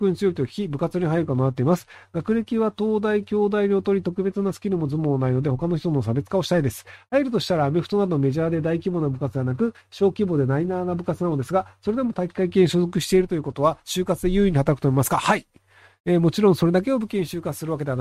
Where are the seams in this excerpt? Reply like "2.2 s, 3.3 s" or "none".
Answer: none